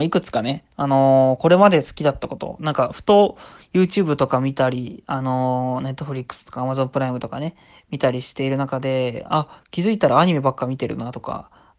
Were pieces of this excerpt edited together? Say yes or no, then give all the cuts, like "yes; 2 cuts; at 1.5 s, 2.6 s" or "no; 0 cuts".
no; 0 cuts